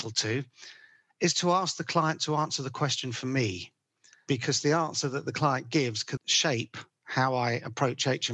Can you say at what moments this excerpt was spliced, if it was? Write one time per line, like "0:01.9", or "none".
0:06.2